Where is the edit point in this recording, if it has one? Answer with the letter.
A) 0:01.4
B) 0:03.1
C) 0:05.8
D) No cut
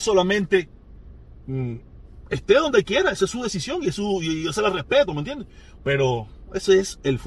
D